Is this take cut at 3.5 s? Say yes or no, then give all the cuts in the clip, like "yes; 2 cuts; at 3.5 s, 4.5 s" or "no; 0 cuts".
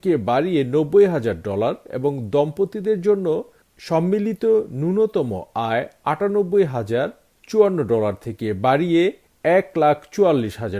no; 0 cuts